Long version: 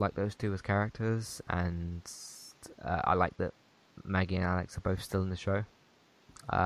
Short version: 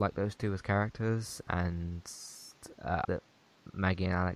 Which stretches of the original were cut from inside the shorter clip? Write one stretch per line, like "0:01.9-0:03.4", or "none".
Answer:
0:03.0-0:03.4